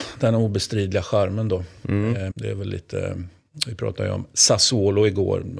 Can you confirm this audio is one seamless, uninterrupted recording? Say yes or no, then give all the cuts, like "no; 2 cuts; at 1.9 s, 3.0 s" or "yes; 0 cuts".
no; 1 cut; at 2.3 s